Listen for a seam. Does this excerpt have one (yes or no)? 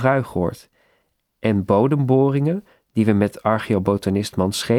no